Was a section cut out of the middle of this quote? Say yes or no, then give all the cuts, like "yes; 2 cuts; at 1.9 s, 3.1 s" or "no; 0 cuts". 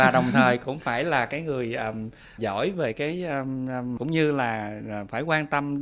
yes; 2 cuts; at 2.4 s, 4.0 s